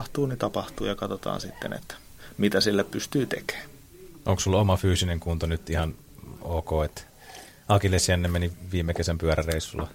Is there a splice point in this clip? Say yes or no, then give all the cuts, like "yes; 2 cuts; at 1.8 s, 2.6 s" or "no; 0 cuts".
no; 0 cuts